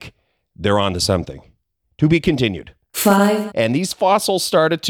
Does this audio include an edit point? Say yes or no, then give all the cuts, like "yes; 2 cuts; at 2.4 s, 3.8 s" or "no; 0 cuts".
yes; 1 cut; at 3.5 s